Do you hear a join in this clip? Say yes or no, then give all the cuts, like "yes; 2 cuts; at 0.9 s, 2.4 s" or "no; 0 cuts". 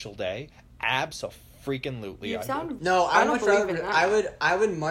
yes; 1 cut; at 2.8 s